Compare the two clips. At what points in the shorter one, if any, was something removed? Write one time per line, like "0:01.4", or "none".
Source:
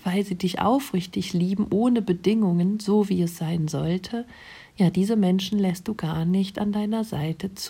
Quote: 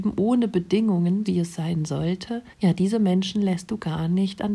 0:01.2
0:02.5